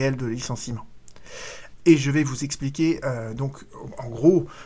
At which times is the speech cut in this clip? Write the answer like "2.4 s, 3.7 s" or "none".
1.8 s

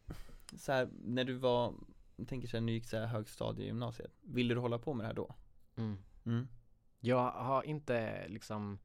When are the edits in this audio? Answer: none

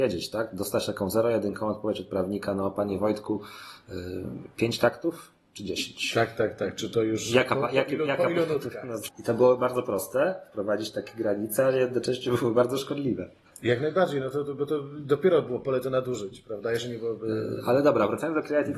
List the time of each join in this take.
9.1 s

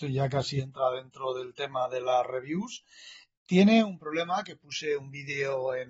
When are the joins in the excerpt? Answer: 3.4 s

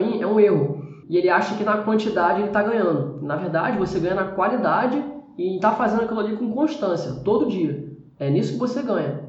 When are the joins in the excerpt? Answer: 1.0 s

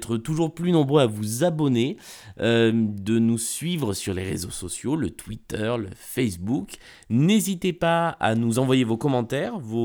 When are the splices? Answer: none

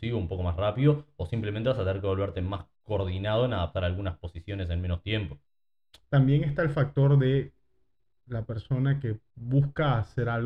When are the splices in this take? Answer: 6.0 s

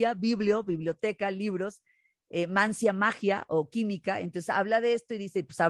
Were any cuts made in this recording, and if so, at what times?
none

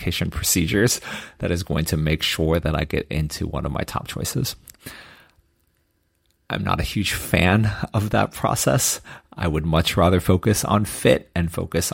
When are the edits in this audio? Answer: none

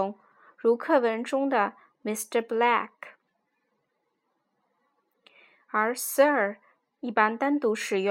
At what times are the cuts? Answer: none

